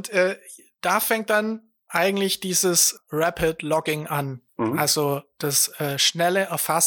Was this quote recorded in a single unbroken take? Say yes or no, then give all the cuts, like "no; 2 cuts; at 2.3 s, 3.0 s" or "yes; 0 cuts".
yes; 0 cuts